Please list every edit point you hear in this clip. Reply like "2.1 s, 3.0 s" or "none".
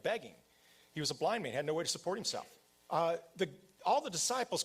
2.8 s